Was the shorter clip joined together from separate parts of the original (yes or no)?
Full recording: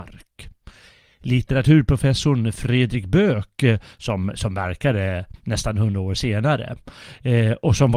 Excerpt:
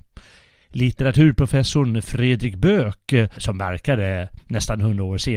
yes